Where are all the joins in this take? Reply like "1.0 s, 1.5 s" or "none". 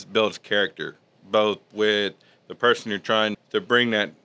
3.3 s